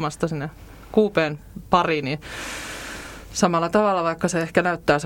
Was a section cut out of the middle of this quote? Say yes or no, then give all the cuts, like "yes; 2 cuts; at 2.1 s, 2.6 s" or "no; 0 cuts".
no; 0 cuts